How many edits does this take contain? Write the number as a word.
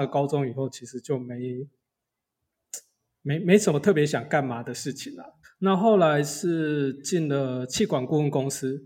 one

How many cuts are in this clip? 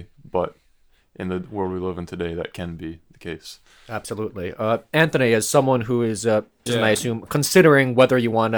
one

